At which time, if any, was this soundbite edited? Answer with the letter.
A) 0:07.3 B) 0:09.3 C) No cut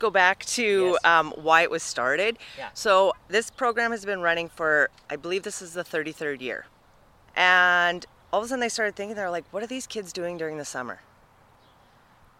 A